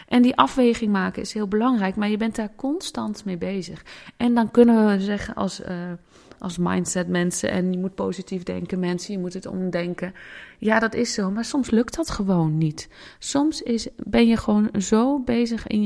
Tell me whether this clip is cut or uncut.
uncut